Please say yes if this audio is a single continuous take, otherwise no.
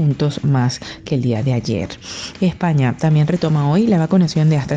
yes